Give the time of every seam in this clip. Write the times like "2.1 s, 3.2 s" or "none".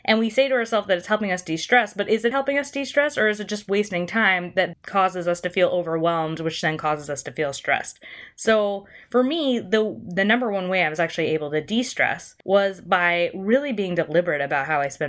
2.3 s, 4.7 s, 12.4 s